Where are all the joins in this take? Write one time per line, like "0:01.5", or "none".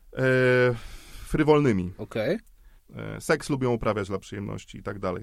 0:02.8